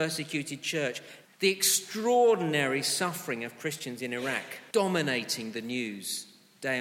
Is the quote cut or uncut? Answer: cut